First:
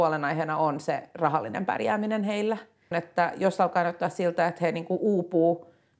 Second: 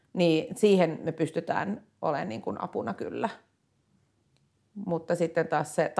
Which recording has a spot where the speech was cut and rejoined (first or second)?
first